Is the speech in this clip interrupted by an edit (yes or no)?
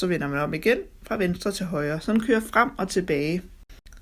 no